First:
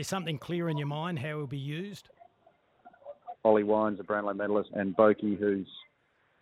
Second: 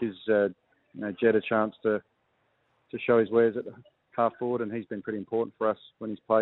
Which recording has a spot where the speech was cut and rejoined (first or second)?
first